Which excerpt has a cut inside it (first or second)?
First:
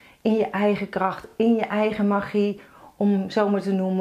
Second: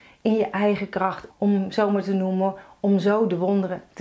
second